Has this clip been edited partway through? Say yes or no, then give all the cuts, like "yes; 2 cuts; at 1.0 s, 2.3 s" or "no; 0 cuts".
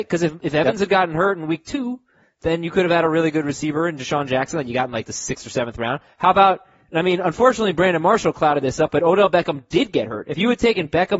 no; 0 cuts